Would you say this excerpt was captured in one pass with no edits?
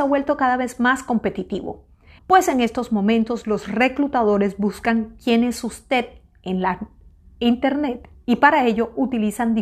no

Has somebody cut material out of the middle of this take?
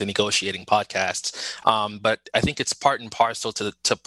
yes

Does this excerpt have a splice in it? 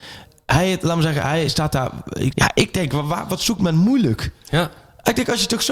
yes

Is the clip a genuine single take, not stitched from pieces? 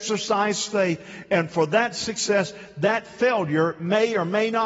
yes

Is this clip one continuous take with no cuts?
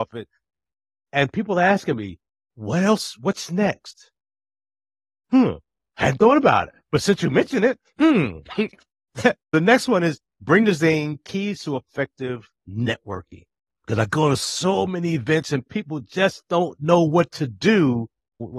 no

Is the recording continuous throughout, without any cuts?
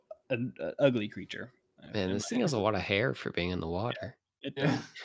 yes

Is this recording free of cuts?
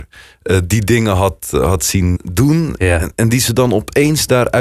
no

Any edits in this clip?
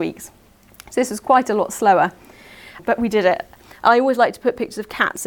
yes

